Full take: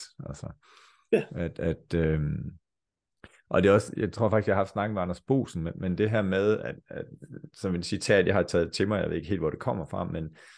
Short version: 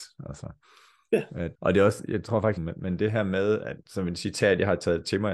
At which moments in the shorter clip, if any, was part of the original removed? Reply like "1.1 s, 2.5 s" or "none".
1.5 s, 2.6 s, 3.8 s